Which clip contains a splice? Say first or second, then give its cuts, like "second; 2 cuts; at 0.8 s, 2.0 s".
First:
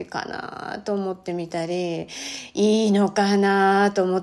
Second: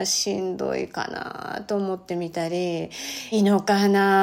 second; 1 cut; at 3.3 s